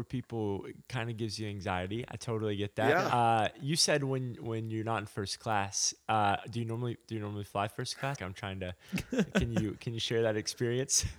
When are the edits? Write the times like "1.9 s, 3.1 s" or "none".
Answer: 8.2 s